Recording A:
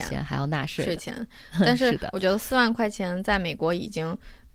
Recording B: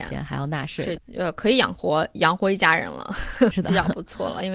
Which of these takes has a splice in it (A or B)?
B